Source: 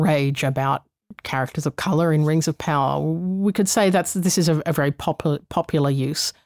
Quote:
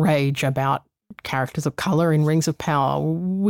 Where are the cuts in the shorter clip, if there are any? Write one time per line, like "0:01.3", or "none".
none